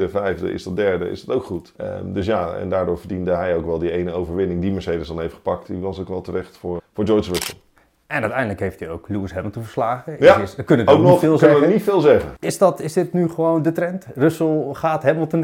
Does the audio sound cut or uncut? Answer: cut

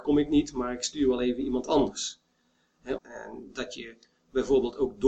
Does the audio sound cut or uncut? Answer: cut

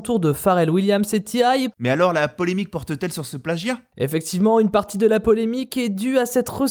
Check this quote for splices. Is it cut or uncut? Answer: cut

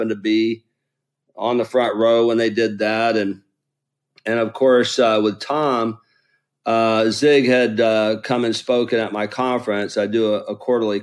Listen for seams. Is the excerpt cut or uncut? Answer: uncut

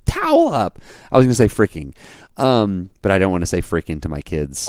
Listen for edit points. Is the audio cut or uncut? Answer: uncut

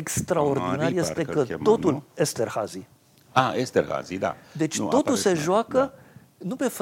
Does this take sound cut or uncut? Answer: uncut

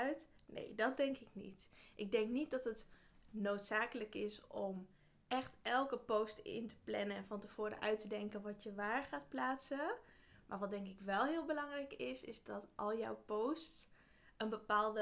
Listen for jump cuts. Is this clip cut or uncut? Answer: uncut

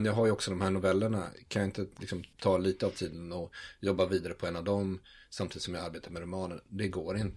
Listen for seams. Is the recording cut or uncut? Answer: cut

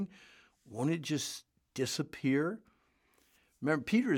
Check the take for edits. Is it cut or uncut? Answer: uncut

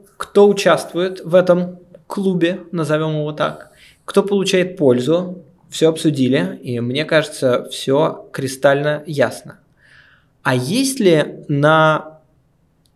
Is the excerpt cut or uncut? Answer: uncut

